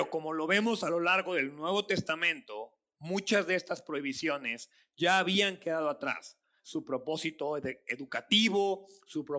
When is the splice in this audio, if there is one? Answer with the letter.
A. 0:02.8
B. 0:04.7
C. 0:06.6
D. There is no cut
C